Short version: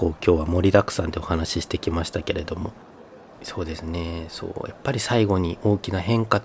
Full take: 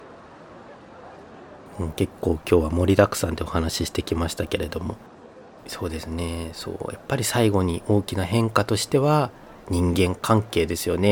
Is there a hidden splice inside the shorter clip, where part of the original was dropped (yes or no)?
no